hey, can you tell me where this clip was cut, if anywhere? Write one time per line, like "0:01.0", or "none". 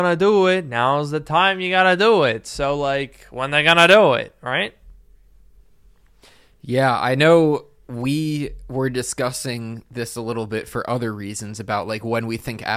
none

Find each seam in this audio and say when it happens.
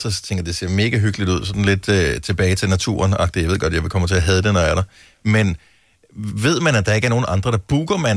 none

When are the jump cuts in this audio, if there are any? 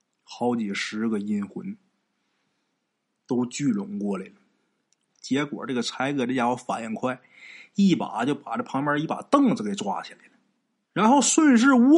0:05.1
0:10.8

